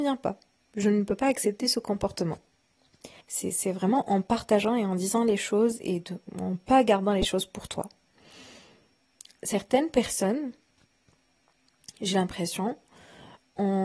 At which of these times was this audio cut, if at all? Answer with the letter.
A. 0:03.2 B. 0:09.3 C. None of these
A